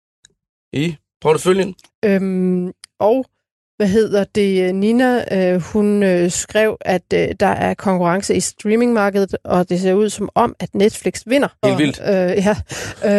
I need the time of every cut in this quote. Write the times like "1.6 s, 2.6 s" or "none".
1.9 s, 11.6 s

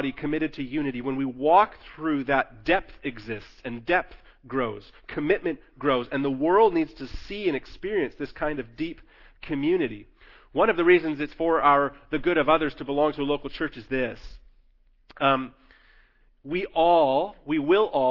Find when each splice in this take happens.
none

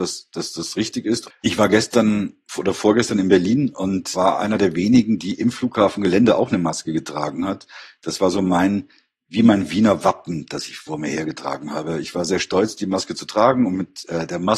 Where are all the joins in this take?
1.3 s

